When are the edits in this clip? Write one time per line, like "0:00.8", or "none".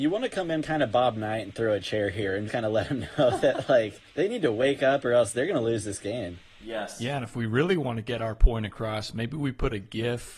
0:02.5